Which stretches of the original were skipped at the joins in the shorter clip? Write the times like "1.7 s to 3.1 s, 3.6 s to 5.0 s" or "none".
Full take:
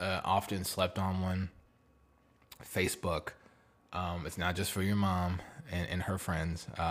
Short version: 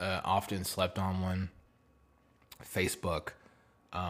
none